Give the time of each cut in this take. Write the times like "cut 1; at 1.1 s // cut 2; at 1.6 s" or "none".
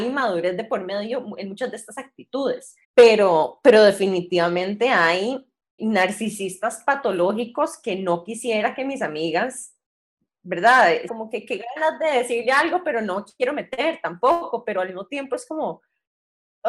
cut 1; at 2.8 s // cut 2; at 5.8 s // cut 3; at 11.1 s